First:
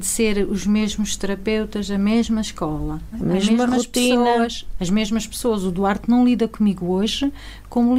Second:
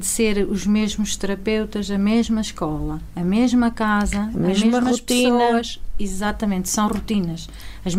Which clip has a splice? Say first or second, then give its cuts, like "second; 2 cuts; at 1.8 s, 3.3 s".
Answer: first; 2 cuts; at 3.1 s, 4.8 s